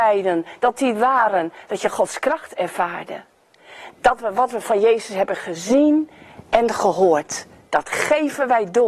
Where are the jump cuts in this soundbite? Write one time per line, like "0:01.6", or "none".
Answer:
0:03.9